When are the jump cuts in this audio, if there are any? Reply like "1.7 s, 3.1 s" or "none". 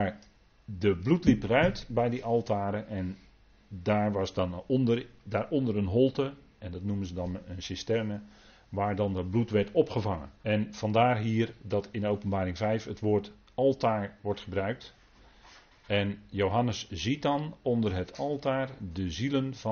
10.4 s